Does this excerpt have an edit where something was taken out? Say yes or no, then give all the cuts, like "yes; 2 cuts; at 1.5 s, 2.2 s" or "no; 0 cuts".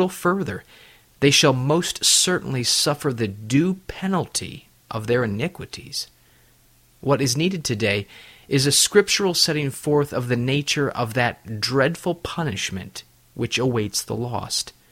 no; 0 cuts